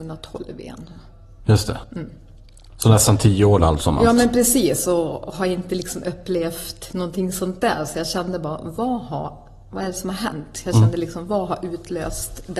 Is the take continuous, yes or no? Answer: yes